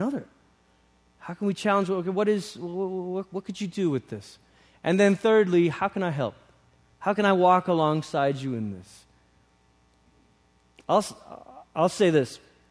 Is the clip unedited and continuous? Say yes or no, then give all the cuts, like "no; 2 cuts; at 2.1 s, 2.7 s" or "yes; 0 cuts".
yes; 0 cuts